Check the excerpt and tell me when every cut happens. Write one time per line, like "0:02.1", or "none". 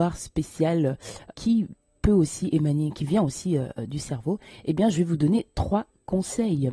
0:01.3